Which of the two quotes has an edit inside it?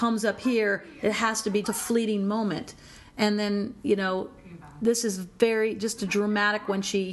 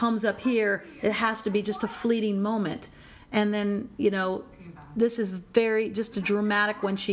first; 1 cut; at 1.6 s

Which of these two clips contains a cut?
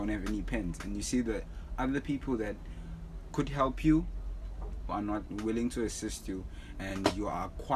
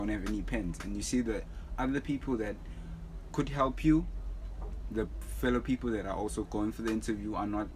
first; 1 cut; at 4.9 s

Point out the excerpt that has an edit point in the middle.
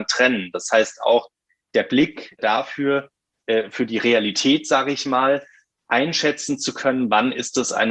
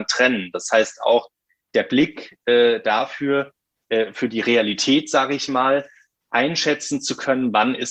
first; 1 cut; at 2.4 s

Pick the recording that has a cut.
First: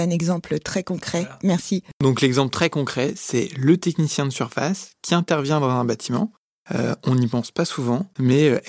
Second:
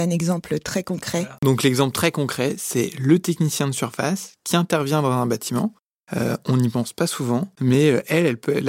second; 1 cut; at 1.4 s

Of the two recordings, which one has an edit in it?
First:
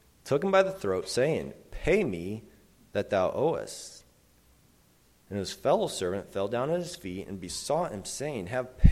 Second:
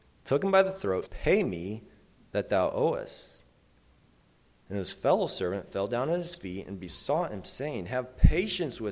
second; 1 cut; at 1.1 s

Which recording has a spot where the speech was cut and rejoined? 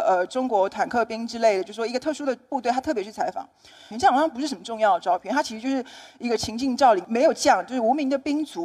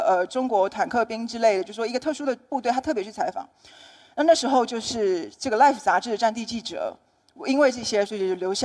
first; 1 cut; at 3.9 s

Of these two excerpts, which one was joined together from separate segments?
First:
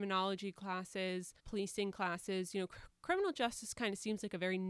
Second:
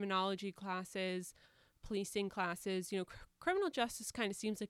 first; 1 cut; at 1.4 s

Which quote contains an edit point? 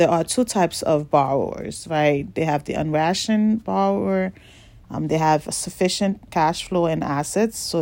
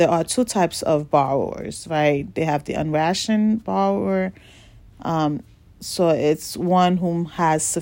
first; 2 cuts; at 4.8 s, 6.3 s

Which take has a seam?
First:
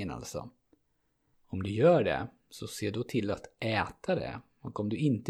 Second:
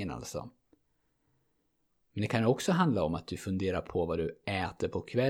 first; 1 cut; at 1.3 s

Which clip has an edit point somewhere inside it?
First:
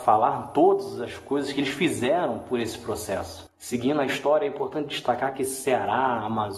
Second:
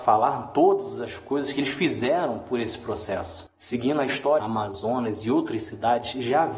second; 1 cut; at 4.4 s

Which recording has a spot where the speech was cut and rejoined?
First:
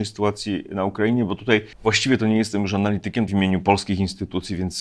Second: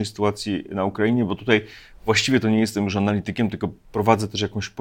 first; 2 cuts; at 1.7 s, 3.3 s

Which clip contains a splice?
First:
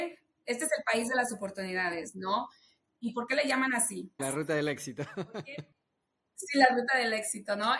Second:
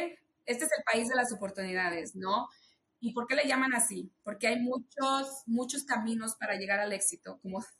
first; 1 cut; at 4.2 s

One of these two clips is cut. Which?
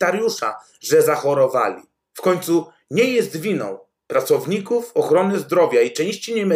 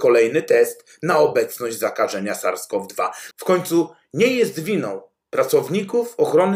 second; 1 cut; at 3.3 s

